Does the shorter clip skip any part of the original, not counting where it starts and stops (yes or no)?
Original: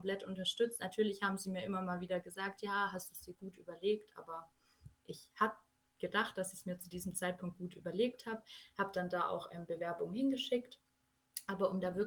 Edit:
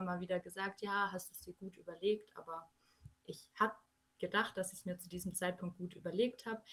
no